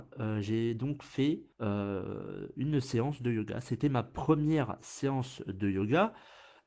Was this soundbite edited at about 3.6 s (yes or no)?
no